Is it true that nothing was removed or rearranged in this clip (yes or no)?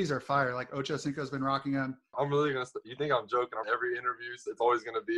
no